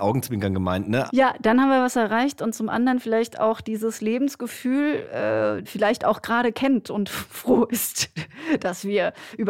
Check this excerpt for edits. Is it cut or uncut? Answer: cut